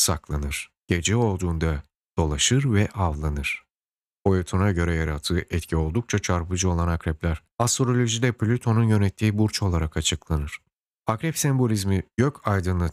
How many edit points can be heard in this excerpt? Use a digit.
2